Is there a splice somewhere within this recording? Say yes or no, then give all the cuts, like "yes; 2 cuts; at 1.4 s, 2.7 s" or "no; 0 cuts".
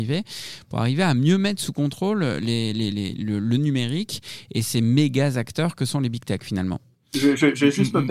no; 0 cuts